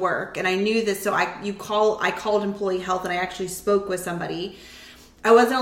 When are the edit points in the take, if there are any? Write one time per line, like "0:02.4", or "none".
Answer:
none